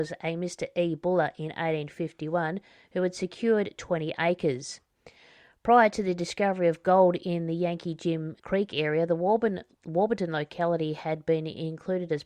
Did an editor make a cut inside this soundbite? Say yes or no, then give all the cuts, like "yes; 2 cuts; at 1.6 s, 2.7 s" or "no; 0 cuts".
yes; 1 cut; at 8.4 s